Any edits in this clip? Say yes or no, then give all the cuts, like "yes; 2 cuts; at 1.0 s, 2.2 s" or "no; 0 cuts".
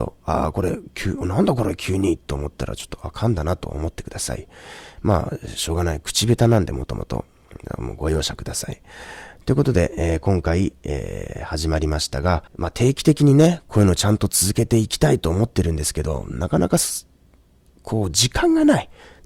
yes; 1 cut; at 12.5 s